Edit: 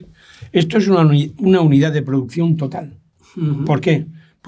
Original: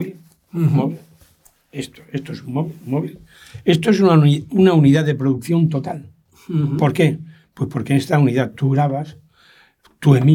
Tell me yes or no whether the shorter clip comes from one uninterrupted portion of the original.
yes